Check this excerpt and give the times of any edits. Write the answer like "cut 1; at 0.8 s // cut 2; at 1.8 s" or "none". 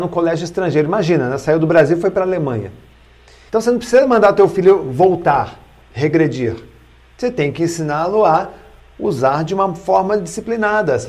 cut 1; at 3.5 s